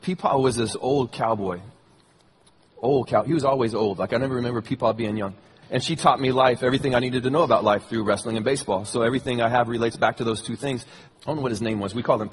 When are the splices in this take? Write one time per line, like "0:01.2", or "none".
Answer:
0:05.6
0:11.1